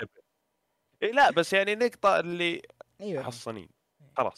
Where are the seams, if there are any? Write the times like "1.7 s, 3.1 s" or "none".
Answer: 3.2 s